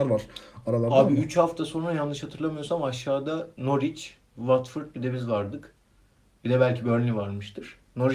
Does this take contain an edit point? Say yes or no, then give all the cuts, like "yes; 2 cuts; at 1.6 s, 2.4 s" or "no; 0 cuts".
no; 0 cuts